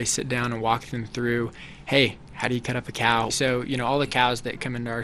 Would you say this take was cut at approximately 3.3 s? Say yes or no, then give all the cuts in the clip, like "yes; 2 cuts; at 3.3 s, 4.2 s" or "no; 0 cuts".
yes; 1 cut; at 3.3 s